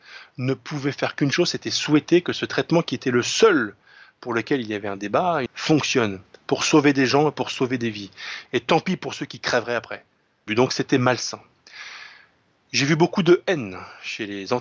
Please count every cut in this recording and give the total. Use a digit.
3